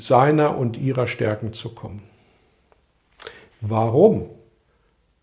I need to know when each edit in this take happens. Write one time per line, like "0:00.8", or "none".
0:03.5